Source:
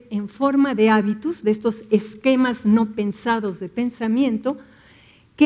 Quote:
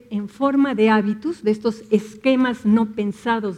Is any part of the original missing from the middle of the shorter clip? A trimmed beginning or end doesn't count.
no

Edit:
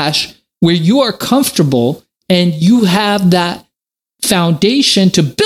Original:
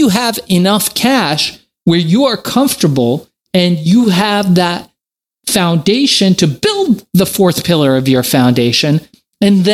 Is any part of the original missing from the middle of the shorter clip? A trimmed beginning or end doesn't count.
no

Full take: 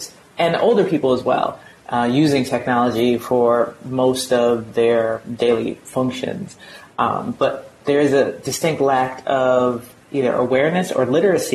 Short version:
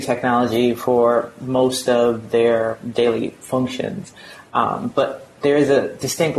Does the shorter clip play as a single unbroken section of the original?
yes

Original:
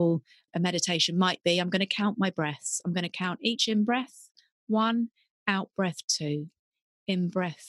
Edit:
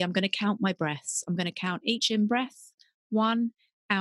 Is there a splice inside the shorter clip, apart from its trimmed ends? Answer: no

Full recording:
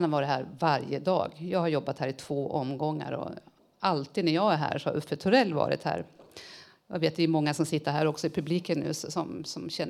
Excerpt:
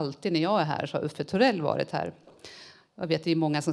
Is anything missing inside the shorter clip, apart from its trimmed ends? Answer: no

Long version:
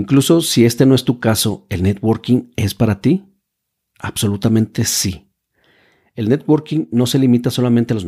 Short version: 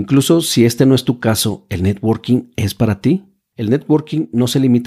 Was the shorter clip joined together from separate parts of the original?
yes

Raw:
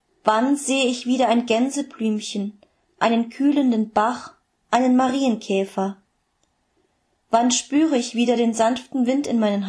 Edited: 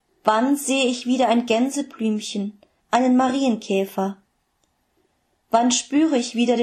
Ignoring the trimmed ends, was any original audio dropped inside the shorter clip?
yes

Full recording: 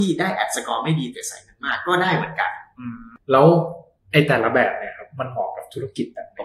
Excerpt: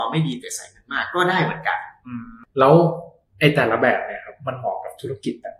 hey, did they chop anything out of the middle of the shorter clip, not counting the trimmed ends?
no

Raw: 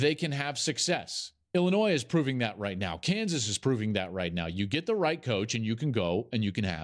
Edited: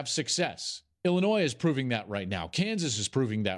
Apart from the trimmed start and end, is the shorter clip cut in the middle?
no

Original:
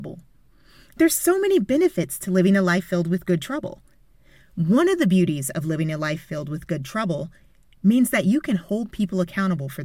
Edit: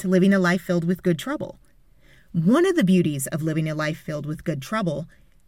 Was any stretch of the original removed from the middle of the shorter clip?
no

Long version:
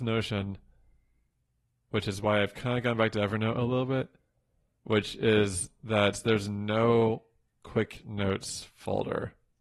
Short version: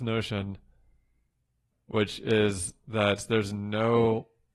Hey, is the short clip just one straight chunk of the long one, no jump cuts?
no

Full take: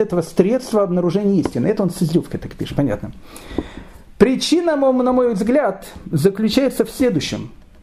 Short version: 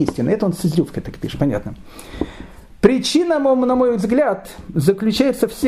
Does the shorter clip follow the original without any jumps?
yes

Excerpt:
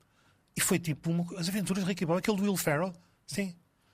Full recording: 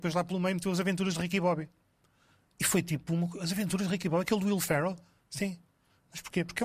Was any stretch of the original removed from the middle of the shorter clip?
no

